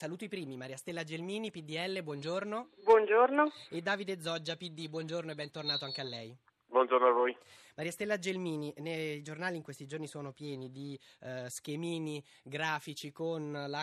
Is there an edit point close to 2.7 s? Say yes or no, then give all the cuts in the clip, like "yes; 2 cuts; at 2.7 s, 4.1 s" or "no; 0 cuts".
no; 0 cuts